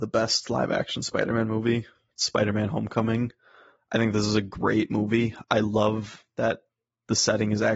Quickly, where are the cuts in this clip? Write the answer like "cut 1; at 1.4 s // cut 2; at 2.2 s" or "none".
none